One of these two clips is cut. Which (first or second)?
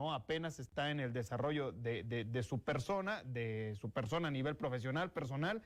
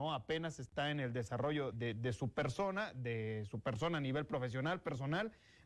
second